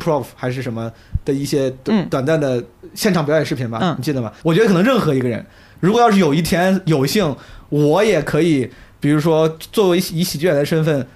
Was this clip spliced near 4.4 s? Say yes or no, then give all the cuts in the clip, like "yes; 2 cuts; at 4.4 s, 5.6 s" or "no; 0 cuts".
yes; 1 cut; at 4.4 s